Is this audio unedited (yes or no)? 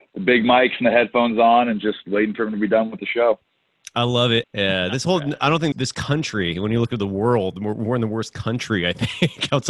no